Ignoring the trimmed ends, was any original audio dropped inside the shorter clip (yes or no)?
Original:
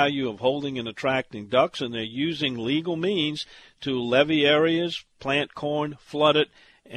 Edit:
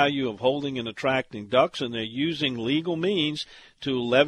no